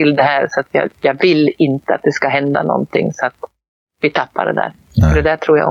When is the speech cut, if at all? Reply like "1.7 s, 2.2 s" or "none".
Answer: 0.9 s